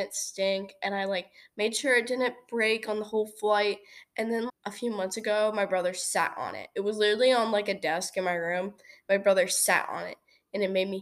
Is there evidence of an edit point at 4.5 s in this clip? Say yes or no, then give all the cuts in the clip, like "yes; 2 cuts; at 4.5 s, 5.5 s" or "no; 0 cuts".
yes; 1 cut; at 4.5 s